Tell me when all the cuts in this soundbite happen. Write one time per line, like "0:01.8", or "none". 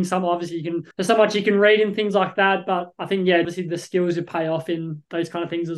0:00.9
0:03.4